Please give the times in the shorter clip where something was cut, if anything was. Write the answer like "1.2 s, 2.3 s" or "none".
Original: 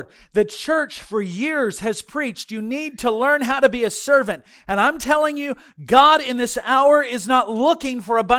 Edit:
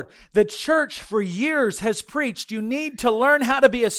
none